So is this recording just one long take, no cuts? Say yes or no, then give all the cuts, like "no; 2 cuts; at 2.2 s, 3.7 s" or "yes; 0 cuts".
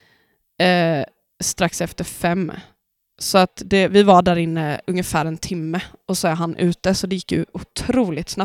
yes; 0 cuts